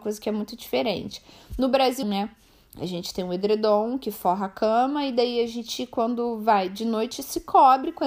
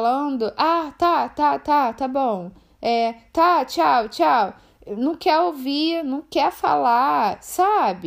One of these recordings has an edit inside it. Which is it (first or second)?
first